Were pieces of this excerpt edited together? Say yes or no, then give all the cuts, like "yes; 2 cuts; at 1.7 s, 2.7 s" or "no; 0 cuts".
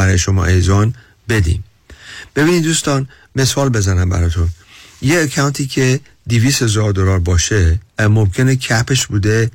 yes; 1 cut; at 7.9 s